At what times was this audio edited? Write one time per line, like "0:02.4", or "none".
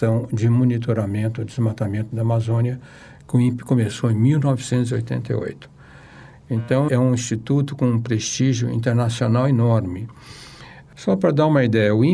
0:06.9